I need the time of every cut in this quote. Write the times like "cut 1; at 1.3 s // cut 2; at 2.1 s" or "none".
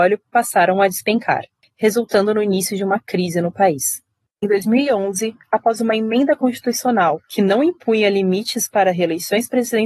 none